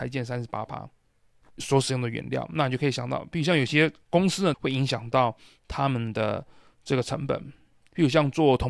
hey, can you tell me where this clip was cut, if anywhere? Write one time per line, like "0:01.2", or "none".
0:01.4
0:04.5